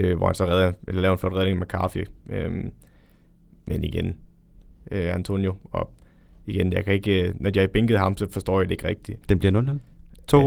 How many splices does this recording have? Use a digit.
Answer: 2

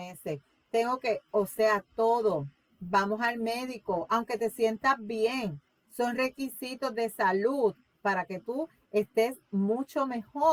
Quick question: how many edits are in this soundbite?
1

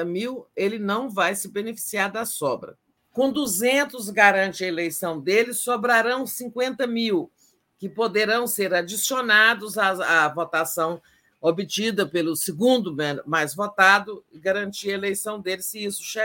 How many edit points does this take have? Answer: 1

